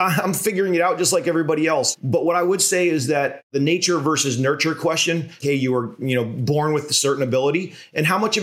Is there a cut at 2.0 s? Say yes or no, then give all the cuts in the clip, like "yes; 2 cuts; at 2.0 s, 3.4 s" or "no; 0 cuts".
no; 1 cut; at 5.4 s